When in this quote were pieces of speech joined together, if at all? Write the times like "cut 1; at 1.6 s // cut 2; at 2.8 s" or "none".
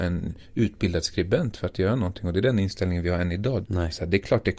cut 1; at 3.6 s

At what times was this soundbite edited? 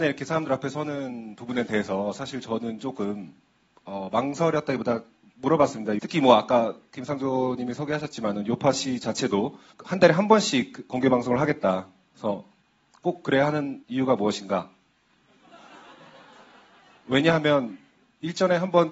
cut 1; at 6.0 s

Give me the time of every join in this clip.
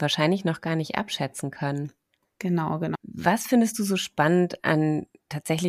cut 1; at 2.9 s

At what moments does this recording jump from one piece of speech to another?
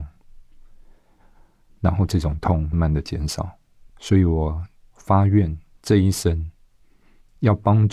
cut 1; at 2.7 s // cut 2; at 3.9 s

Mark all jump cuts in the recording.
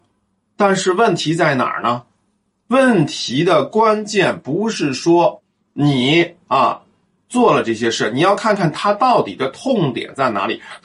none

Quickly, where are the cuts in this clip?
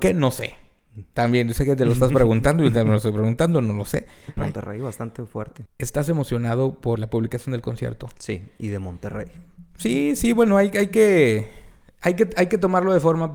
cut 1; at 4.4 s // cut 2; at 5.7 s // cut 3; at 7.0 s

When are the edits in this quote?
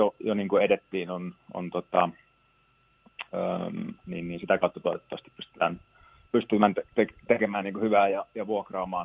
cut 1; at 4.0 s

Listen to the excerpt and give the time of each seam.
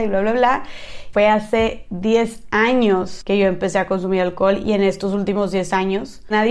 cut 1; at 1.1 s

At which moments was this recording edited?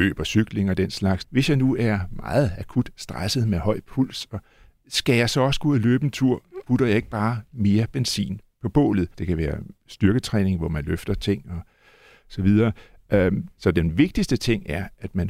cut 1; at 1.2 s // cut 2; at 9.1 s // cut 3; at 13.5 s

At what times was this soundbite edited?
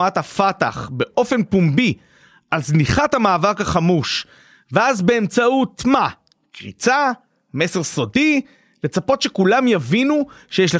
none

